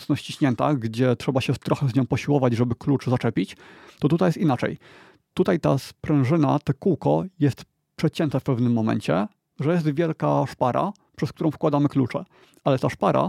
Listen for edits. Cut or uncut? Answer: uncut